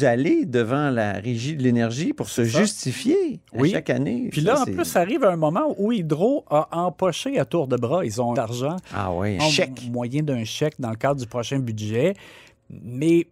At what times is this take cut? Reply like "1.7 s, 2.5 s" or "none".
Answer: 8.3 s, 9.4 s